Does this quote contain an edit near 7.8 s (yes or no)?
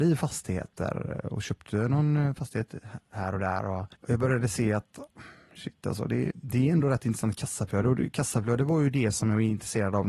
no